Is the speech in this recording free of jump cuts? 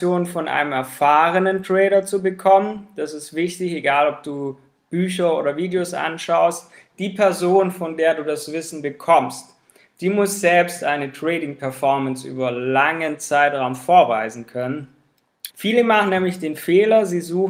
no; 1 cut; at 15.5 s

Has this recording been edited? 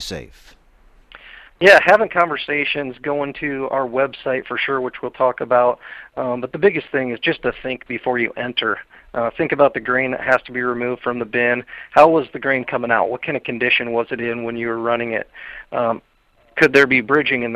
no; 0 cuts

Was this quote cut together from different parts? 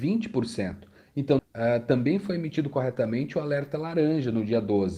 yes; 1 cut; at 1.4 s

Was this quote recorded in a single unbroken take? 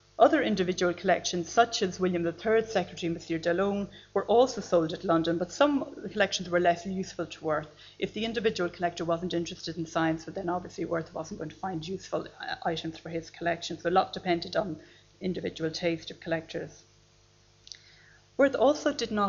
yes; 0 cuts

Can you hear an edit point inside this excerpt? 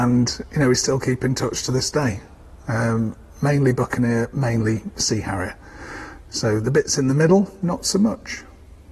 no; 0 cuts

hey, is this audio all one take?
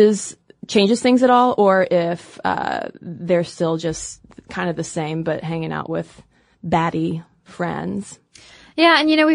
yes; 0 cuts

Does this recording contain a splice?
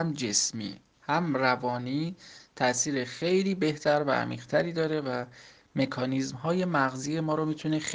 no; 0 cuts

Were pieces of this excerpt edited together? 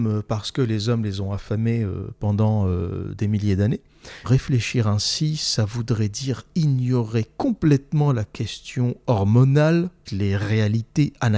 yes; 2 cuts; at 4.2 s, 10.1 s

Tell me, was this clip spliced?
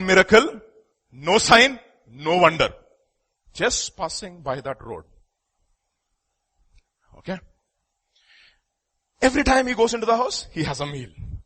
yes; 1 cut; at 0.9 s

